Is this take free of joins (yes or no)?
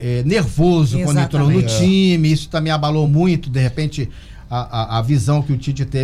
yes